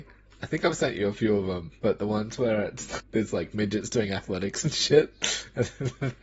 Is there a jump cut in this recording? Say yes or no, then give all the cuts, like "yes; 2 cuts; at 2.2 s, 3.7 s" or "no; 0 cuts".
yes; 1 cut; at 3.0 s